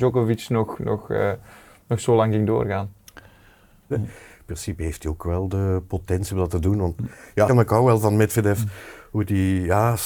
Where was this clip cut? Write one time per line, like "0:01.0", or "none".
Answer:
0:03.9
0:07.5